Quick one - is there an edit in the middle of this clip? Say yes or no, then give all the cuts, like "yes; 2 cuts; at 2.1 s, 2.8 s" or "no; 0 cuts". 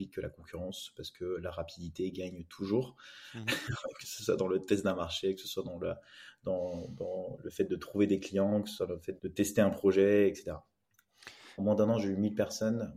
yes; 2 cuts; at 9.2 s, 11.6 s